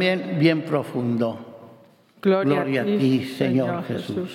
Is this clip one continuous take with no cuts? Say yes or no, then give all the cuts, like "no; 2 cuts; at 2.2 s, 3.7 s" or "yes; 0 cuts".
no; 1 cut; at 2.2 s